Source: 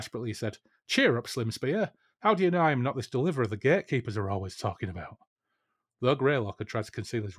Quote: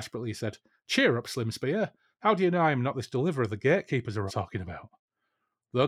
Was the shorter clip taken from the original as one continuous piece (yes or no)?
no